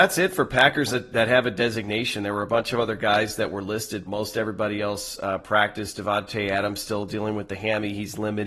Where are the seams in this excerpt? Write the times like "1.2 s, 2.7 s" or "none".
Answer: 4.1 s

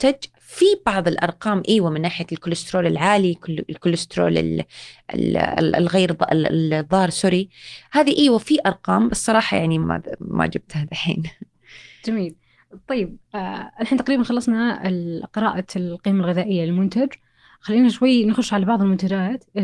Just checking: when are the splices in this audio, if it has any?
9.8 s

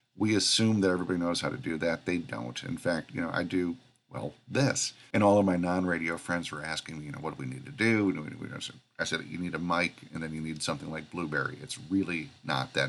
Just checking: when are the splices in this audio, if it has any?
none

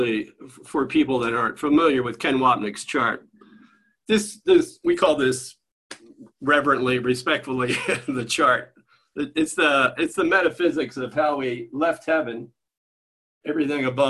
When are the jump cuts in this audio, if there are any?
none

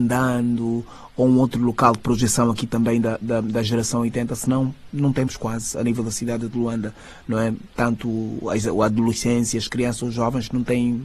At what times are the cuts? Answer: none

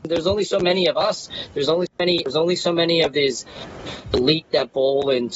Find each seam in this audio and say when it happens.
1.9 s, 4.0 s

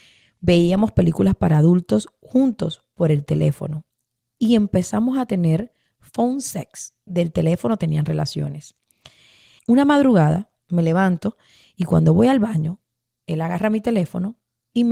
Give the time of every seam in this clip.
7.1 s, 9.6 s

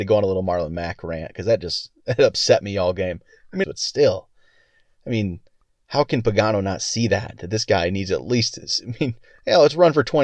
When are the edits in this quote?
3.6 s

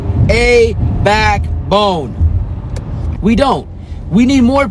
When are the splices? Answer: 3.2 s

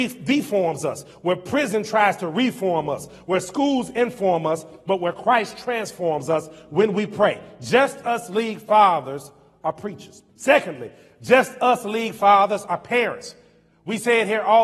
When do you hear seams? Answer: 10.3 s

